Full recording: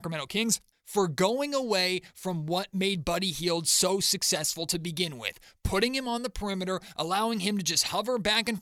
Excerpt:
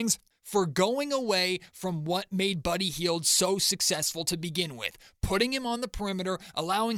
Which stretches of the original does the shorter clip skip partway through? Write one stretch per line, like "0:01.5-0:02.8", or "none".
none